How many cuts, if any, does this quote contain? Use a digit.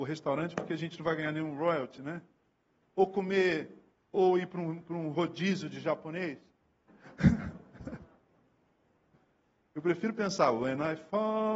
2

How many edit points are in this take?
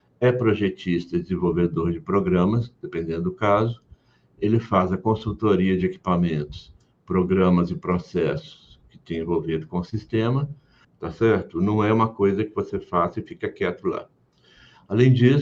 1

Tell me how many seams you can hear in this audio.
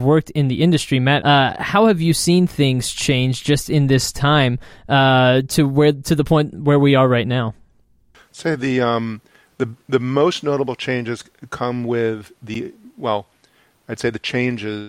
1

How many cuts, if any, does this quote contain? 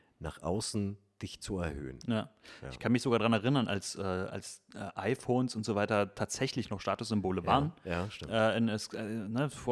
0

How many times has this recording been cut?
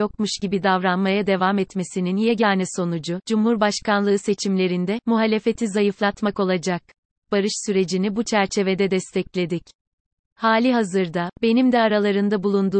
1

